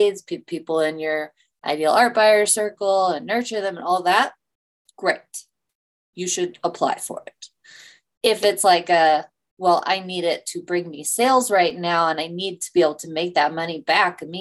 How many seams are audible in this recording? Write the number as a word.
zero